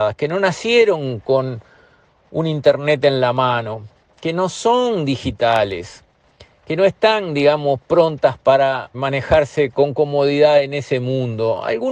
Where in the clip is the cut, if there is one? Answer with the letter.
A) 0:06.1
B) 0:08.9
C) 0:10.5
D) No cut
B